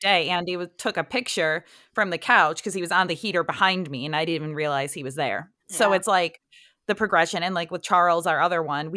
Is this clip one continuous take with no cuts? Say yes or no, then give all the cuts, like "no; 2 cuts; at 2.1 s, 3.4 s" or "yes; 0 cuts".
yes; 0 cuts